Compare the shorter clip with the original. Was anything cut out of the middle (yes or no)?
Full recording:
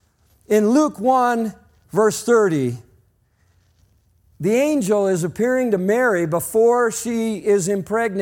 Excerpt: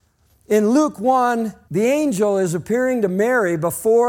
yes